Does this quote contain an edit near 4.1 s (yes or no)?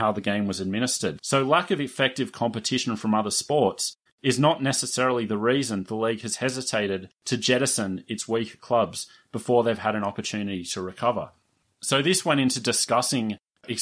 yes